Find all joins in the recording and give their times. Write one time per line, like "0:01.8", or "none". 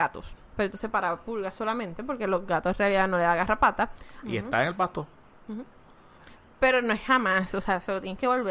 0:04.2